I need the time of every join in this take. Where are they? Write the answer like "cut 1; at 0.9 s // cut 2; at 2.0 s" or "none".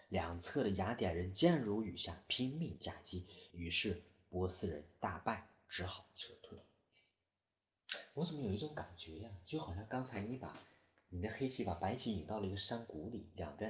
cut 1; at 3.5 s